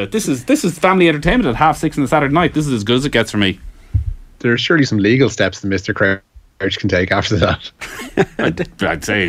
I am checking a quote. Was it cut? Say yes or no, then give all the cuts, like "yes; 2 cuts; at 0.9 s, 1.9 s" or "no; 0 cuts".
no; 0 cuts